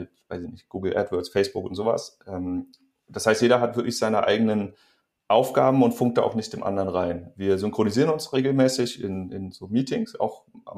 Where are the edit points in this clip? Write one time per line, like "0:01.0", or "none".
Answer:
none